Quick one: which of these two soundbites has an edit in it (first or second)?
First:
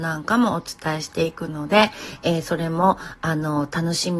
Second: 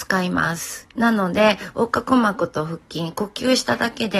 second